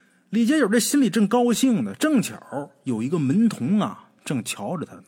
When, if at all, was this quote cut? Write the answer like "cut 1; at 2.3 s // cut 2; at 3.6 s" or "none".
none